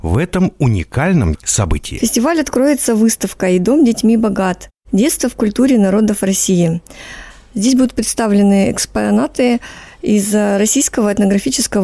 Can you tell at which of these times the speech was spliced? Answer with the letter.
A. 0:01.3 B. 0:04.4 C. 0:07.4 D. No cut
A